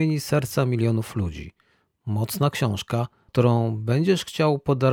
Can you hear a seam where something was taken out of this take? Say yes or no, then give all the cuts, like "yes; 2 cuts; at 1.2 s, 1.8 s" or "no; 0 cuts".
no; 0 cuts